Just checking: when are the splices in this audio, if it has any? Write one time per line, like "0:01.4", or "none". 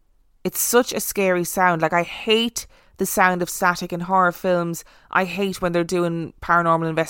none